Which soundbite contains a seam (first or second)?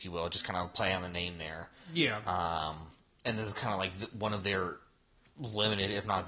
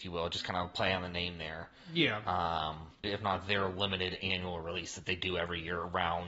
second